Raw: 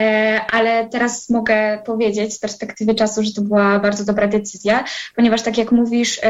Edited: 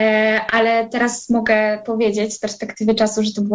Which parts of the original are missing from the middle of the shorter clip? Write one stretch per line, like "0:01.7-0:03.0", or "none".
none